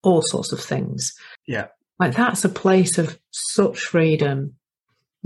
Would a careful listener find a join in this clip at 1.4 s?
yes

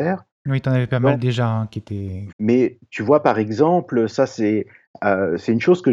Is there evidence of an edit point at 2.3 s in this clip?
yes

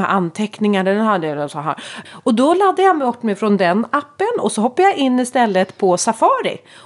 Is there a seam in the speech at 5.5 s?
no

